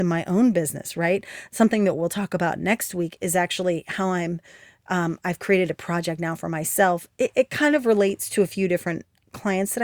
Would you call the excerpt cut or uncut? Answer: uncut